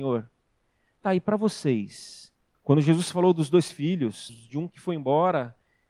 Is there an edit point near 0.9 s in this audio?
no; 2 cuts; at 2.5 s, 4.3 s

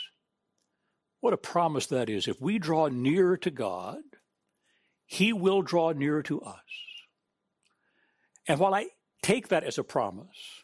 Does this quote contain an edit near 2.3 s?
no; 0 cuts

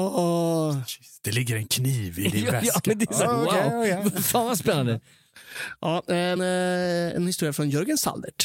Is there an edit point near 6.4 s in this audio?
yes; 1 cut; at 6.4 s

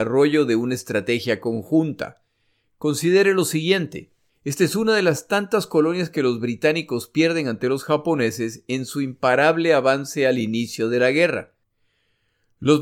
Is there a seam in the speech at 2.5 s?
no; 1 cut; at 4.3 s

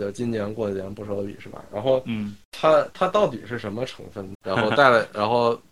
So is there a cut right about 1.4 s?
no; 1 cut; at 4.3 s

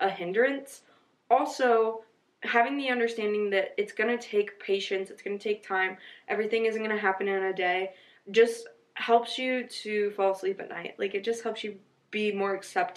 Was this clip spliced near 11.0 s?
no; 0 cuts

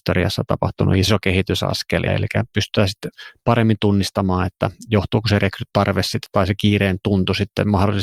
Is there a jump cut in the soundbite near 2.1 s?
yes; 1 cut; at 2.1 s

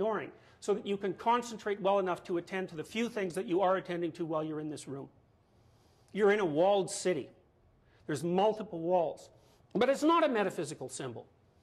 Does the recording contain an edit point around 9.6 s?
yes; 1 cut; at 9.6 s

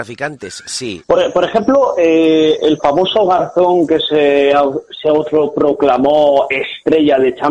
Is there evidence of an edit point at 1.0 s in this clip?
yes; 1 cut; at 1.0 s

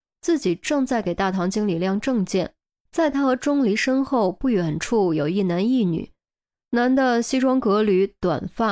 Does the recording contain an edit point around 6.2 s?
no; 1 cut; at 2.8 s

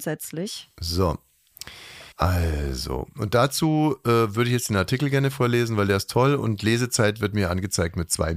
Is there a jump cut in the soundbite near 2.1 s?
yes; 1 cut; at 2.1 s

